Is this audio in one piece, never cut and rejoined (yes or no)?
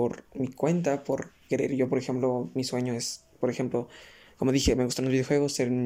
yes